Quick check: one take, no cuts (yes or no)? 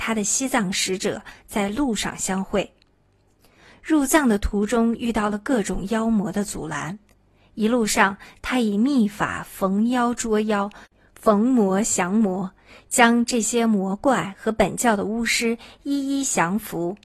yes